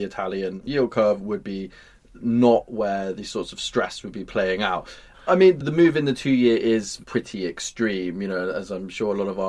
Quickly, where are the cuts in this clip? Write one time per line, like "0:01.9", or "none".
0:05.1